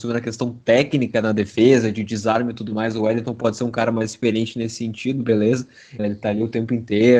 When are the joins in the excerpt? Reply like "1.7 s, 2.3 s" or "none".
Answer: 6.0 s